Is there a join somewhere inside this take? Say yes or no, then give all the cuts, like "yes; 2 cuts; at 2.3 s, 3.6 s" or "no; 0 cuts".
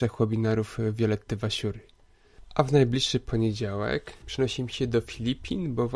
yes; 1 cut; at 4.2 s